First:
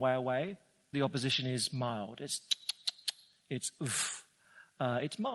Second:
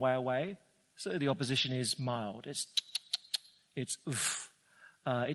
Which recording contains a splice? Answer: first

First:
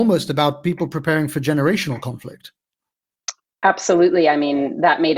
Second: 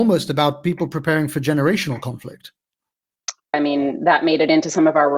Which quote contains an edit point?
second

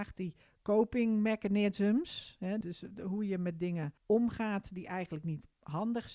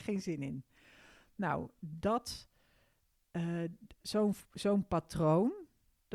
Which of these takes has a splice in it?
first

